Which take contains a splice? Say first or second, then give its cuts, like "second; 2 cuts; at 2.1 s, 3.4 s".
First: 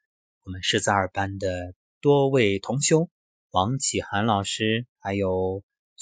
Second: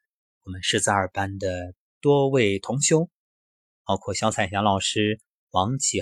first; 1 cut; at 3.4 s